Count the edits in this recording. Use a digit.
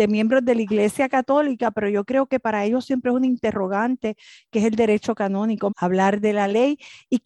1